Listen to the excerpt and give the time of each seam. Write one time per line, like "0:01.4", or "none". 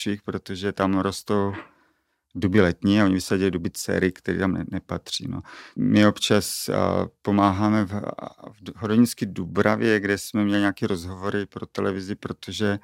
0:05.8